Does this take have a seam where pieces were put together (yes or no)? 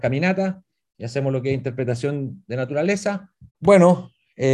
yes